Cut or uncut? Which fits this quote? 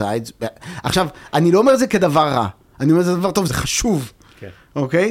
cut